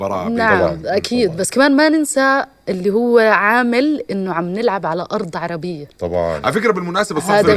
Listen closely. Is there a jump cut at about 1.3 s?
no; 0 cuts

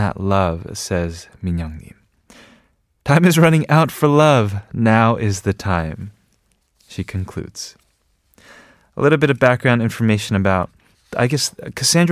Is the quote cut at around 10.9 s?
yes; 1 cut; at 10.9 s

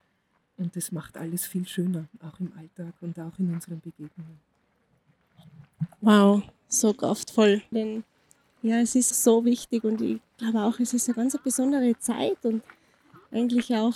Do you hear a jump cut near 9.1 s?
yes; 2 cuts; at 7.7 s, 9.1 s

